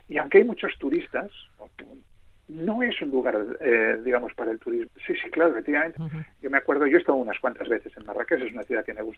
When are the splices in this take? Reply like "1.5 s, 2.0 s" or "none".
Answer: 4.9 s, 6.0 s